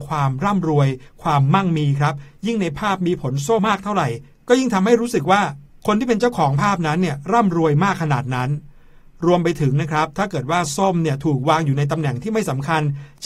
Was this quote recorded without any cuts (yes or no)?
no